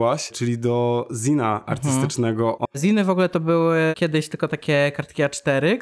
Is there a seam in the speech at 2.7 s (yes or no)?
yes